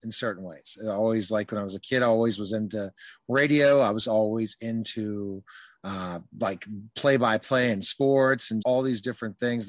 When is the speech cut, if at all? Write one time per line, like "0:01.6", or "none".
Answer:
0:08.6